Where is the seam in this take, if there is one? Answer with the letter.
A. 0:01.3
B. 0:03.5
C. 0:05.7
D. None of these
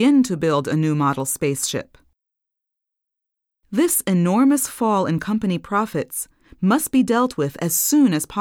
D